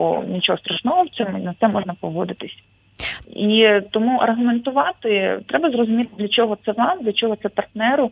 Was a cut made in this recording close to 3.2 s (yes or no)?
yes